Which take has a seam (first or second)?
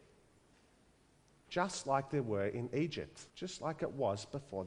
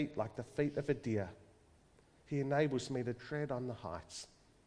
first